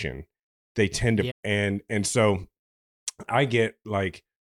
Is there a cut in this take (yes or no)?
yes